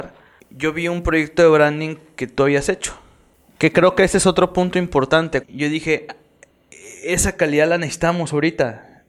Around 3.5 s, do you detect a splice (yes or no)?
yes